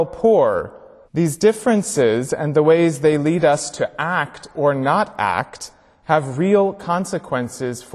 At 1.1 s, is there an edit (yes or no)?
yes